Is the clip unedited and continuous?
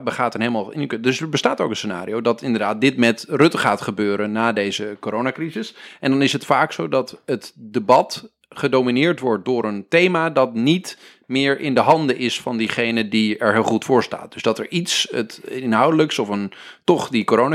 yes; 0 cuts

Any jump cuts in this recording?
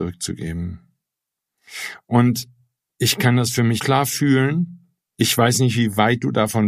yes; 1 cut; at 3.8 s

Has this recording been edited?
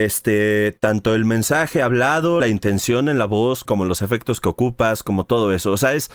yes; 2 cuts; at 2.4 s, 3.7 s

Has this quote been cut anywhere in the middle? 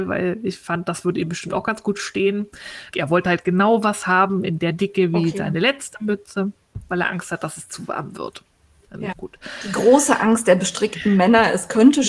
yes; 2 cuts; at 2.9 s, 9.1 s

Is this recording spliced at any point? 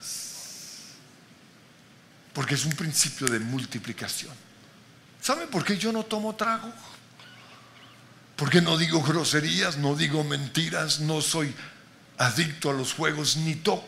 yes; 1 cut; at 5.1 s

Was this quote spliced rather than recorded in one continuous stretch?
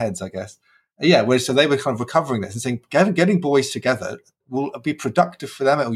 no; 0 cuts

